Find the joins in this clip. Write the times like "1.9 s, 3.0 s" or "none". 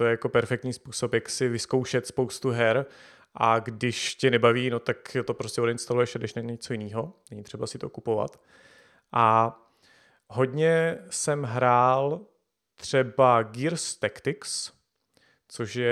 none